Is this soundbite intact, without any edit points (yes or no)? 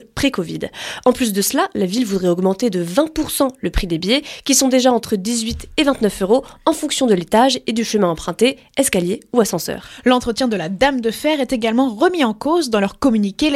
yes